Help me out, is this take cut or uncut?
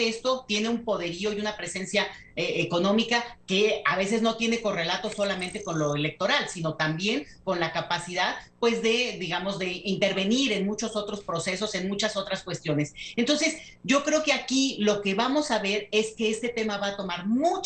uncut